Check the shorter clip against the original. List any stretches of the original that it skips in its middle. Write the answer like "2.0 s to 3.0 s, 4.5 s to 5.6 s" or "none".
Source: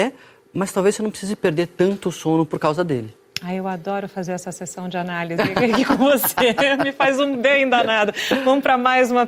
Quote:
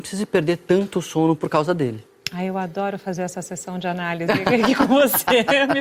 none